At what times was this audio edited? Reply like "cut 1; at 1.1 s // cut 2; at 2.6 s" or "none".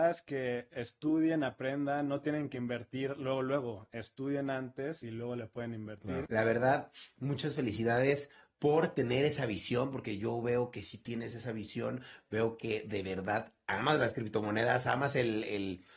cut 1; at 6.3 s